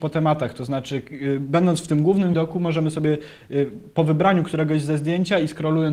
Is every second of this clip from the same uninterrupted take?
no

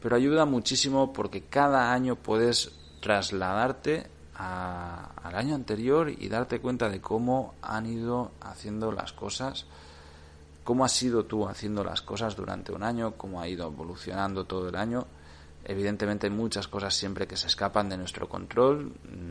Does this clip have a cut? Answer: no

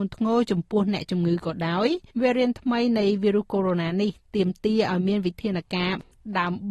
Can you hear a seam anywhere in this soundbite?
yes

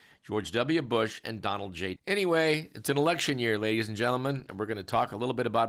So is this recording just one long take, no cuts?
no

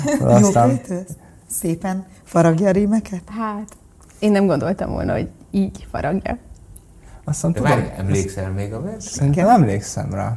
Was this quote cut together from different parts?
no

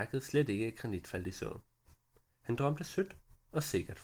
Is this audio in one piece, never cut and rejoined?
yes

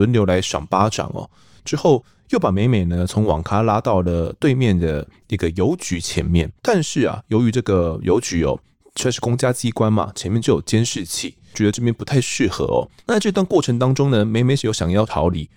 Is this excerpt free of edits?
no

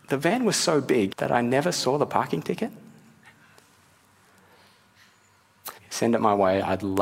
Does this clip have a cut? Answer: yes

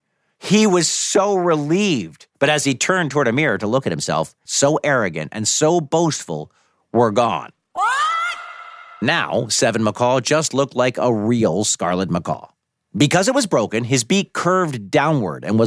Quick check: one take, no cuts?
no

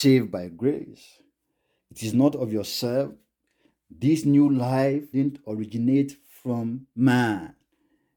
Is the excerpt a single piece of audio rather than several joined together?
no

